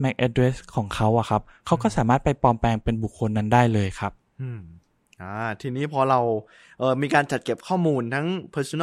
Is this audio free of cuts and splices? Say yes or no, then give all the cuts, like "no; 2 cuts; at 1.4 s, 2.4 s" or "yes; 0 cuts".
yes; 0 cuts